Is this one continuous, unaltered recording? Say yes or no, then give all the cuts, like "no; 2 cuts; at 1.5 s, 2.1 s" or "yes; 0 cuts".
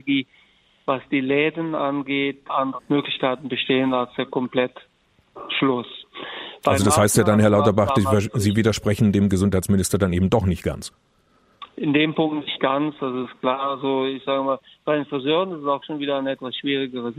yes; 0 cuts